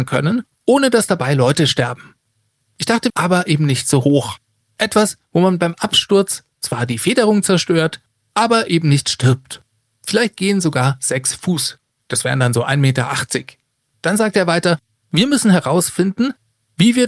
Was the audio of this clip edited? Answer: yes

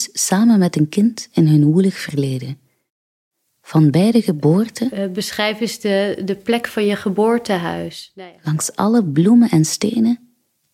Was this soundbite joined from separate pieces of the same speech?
no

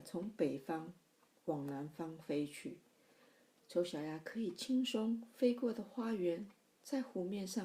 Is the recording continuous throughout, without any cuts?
no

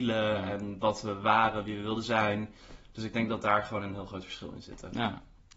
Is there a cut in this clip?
no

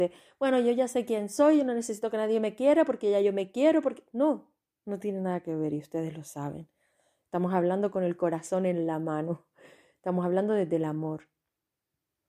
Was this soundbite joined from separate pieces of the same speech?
no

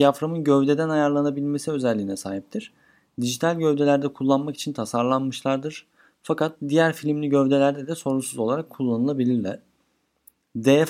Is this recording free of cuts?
yes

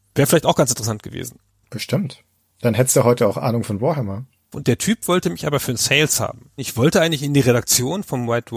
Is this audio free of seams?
no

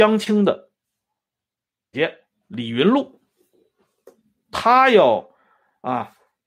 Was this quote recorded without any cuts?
no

